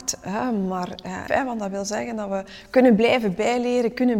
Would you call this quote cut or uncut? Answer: cut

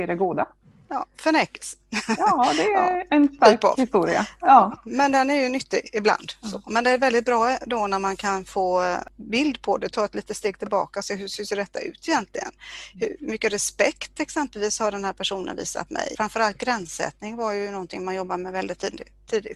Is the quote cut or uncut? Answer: cut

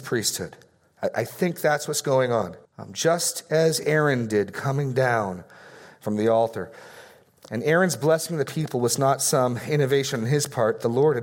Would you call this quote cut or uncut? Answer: cut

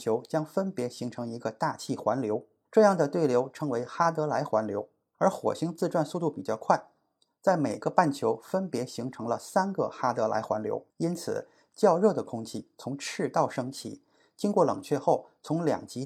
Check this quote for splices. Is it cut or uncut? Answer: cut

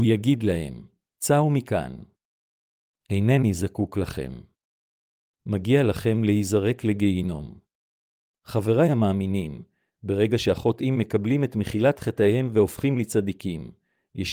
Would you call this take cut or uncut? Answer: cut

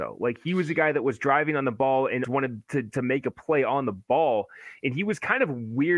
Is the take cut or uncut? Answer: cut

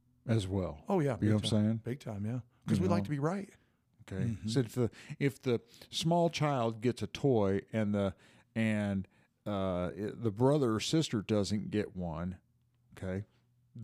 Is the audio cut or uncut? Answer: cut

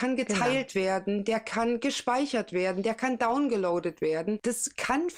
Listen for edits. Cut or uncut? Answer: uncut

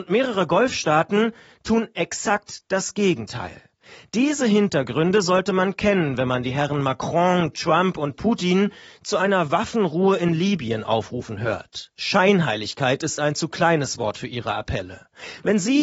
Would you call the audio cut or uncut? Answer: uncut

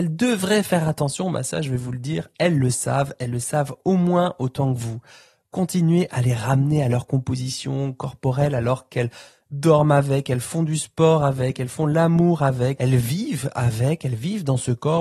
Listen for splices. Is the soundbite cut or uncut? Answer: cut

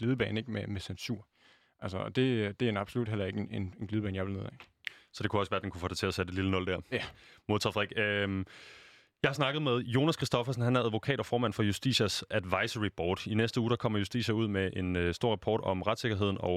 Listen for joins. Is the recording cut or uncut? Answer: uncut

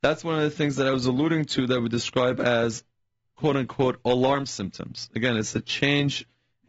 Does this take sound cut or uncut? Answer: uncut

